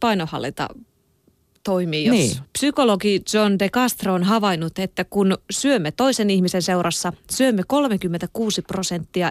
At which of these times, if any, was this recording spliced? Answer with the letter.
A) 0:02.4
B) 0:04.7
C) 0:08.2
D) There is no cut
A